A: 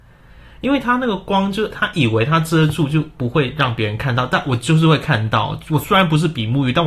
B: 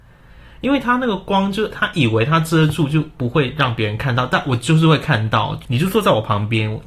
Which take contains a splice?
B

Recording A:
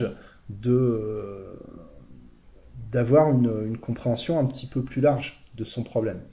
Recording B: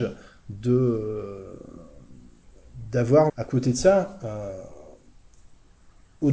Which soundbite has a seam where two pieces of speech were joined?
B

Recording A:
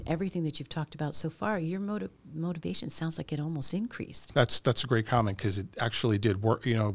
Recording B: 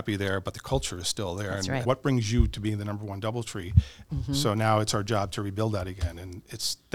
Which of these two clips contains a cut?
B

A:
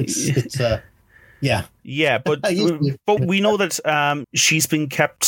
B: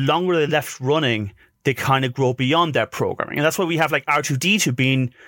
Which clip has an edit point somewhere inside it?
A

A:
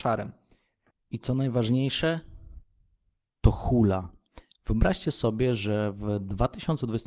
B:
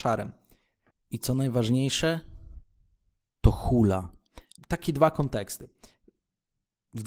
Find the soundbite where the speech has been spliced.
B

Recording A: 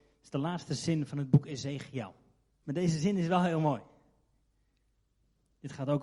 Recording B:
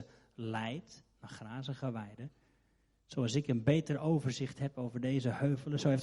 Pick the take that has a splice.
A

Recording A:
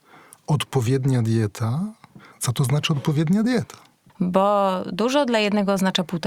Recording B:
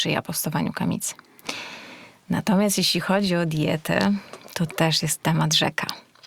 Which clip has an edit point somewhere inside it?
A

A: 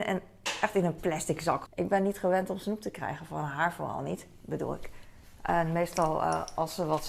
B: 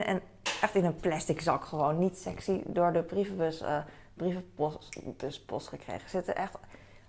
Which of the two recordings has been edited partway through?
A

